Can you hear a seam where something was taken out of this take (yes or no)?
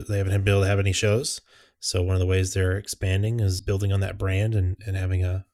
yes